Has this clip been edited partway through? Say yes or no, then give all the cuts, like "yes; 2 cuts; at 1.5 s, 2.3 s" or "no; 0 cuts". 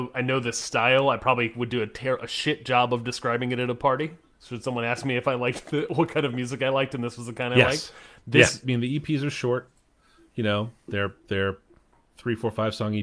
yes; 1 cut; at 8.6 s